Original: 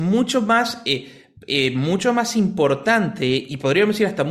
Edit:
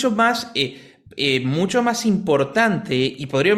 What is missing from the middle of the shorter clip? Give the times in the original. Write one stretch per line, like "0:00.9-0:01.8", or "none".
none